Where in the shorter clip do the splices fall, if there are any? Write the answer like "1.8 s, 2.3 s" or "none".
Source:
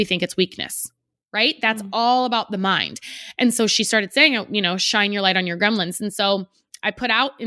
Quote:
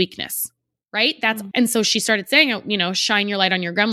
1.5 s